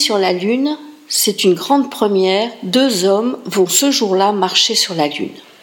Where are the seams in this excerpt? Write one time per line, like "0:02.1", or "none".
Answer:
none